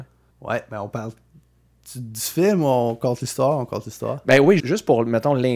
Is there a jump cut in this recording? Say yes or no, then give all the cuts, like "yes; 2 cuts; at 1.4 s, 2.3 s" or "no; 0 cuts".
yes; 1 cut; at 4.6 s